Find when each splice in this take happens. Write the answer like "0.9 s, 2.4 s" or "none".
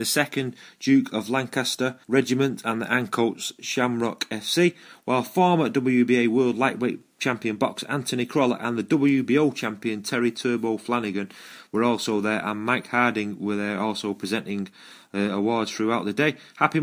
2.0 s